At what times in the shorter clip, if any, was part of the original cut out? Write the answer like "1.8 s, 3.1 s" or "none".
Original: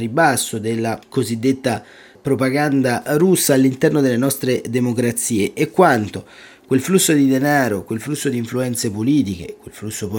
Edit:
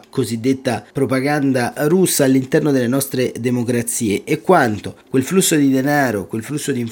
0.9 s, 5.0 s

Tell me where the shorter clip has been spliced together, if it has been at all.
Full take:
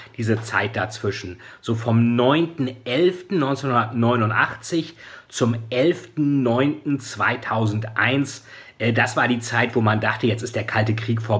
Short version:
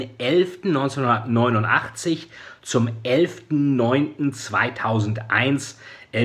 none

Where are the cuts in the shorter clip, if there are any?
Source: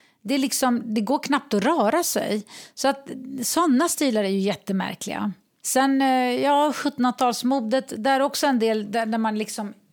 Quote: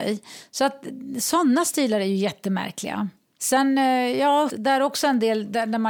4.5 s

